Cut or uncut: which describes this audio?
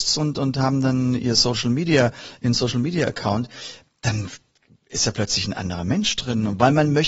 uncut